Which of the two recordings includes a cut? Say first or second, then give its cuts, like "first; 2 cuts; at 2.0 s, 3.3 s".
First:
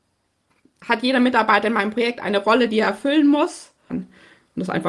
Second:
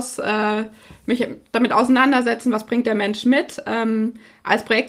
first; 1 cut; at 3.9 s